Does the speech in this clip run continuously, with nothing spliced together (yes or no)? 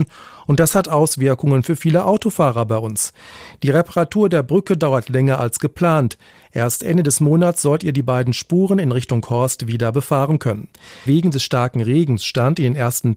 no